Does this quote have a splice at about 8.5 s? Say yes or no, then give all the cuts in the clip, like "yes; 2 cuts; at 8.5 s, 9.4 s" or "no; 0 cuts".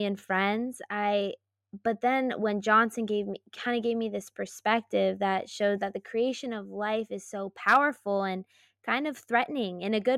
no; 0 cuts